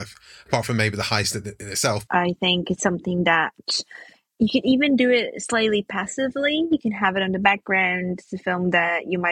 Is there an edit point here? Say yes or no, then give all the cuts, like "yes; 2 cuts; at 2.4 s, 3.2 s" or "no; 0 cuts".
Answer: yes; 1 cut; at 2.1 s